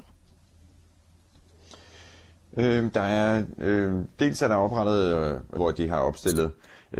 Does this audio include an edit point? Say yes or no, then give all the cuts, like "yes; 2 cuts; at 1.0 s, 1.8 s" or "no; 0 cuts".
yes; 1 cut; at 5.6 s